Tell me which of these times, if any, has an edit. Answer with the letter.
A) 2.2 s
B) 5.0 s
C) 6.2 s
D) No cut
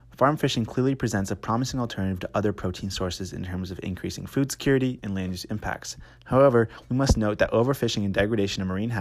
B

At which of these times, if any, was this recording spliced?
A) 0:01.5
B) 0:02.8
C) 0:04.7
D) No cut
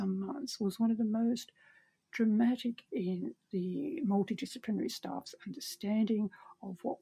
B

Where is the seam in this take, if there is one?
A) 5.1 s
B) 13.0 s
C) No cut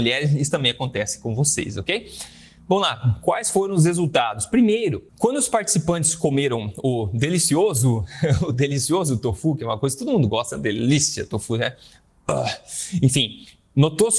A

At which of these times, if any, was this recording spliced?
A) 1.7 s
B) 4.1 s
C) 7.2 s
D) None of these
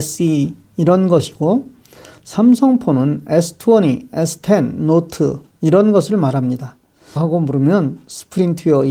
C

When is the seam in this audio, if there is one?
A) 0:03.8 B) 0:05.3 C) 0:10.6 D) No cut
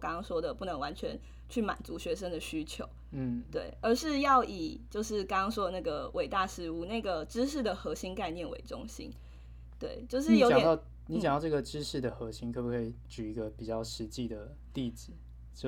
D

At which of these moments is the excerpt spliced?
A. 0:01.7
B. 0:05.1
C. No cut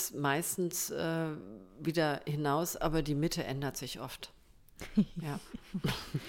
C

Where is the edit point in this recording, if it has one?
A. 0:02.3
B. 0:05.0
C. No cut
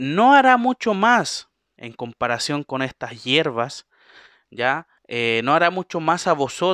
B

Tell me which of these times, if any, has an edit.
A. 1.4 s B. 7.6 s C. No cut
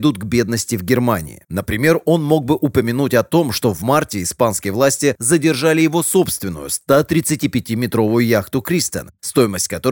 A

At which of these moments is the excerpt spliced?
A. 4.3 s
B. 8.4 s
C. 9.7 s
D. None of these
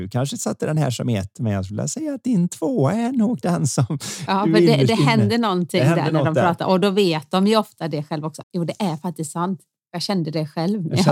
B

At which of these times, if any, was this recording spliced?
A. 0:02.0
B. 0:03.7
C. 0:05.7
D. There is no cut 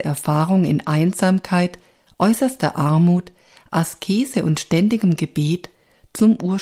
D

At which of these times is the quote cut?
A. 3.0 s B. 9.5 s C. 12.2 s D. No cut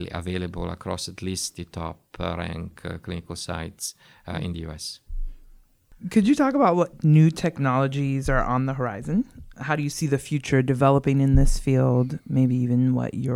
B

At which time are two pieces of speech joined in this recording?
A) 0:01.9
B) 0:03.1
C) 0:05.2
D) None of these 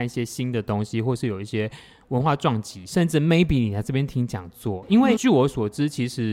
C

